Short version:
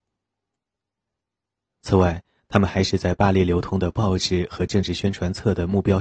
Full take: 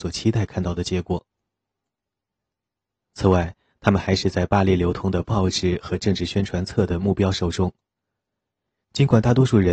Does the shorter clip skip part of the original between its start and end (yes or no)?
no